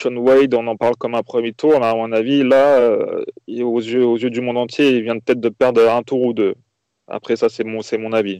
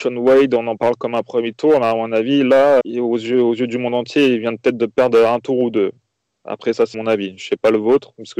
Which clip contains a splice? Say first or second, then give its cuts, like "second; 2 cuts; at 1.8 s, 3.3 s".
second; 2 cuts; at 2.8 s, 6.9 s